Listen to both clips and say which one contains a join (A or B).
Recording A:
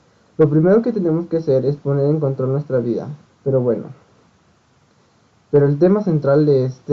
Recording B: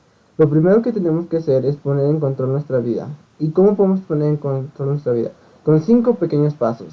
A